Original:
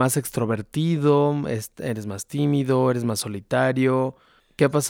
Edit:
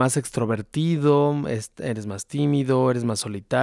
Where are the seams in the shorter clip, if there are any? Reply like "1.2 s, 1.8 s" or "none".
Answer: none